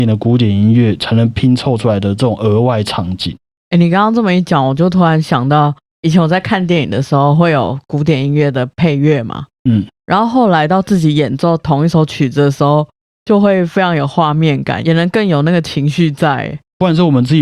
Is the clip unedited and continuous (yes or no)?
yes